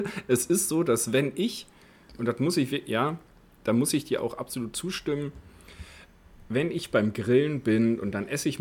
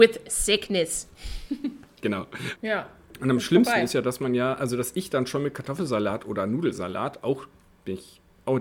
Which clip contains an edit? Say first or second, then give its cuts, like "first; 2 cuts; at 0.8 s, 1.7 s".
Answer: second; 1 cut; at 2.6 s